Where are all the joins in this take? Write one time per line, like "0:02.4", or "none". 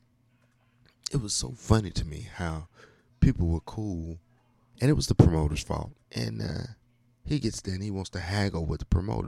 0:06.0